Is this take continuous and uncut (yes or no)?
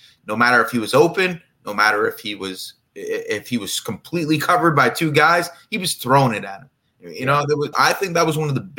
no